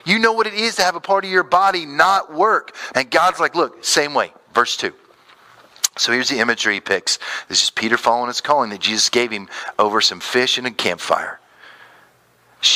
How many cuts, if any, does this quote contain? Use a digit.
1